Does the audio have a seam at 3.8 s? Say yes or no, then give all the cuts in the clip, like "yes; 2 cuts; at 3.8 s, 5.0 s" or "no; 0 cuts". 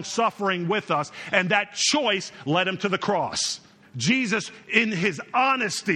yes; 1 cut; at 3.8 s